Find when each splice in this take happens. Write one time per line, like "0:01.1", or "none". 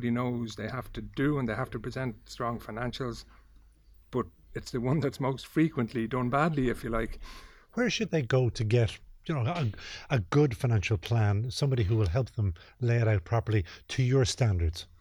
none